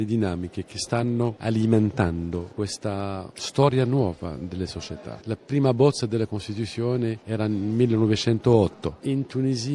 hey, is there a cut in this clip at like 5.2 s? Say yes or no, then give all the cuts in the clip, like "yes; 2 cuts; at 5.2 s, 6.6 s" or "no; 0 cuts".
yes; 1 cut; at 5.2 s